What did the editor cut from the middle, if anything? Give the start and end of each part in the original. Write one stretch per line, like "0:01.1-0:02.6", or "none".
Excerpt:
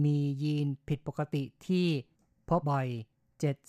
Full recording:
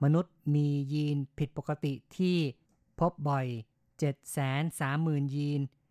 0:03.1-0:03.2